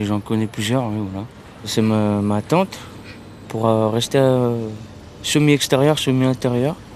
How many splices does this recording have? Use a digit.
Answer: 1